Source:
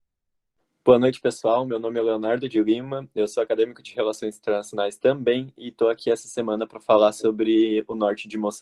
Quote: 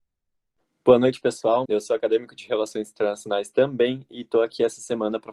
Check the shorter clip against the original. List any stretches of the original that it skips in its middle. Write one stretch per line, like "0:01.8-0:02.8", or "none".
0:01.6-0:03.1